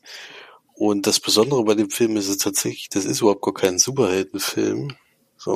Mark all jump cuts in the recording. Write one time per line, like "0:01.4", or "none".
none